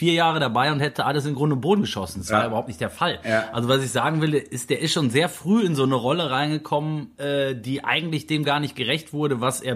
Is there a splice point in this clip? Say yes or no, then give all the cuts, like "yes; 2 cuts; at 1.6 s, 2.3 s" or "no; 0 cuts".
no; 0 cuts